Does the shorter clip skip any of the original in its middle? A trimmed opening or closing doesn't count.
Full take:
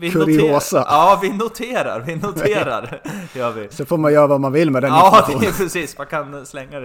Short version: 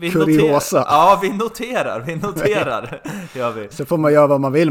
no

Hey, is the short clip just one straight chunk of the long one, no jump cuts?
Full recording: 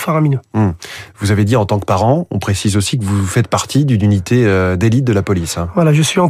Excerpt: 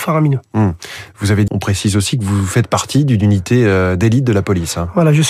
no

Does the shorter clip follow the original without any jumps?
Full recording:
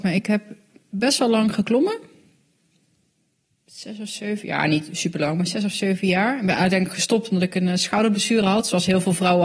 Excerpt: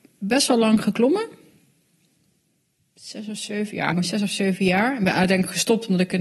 no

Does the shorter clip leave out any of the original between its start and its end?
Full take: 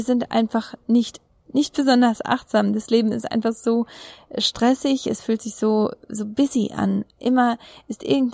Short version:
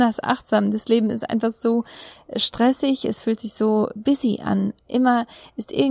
yes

